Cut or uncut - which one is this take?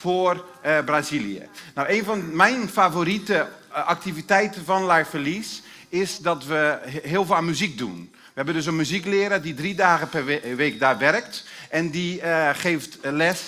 uncut